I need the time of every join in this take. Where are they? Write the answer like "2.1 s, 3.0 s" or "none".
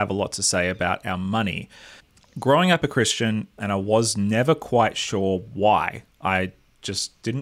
3.6 s